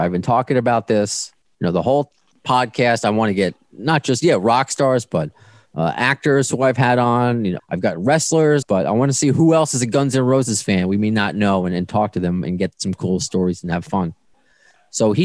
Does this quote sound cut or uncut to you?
cut